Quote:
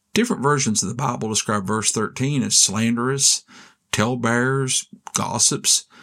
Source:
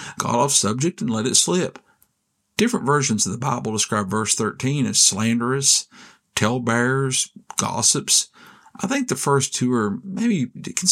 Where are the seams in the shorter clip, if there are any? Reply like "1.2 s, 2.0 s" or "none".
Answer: none